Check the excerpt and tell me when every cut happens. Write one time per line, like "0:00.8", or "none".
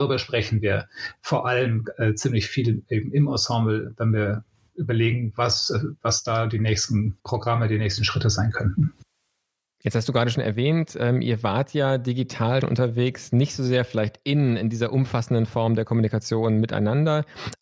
0:07.2
0:12.6